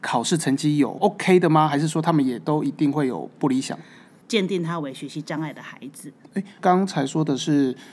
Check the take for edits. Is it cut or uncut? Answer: cut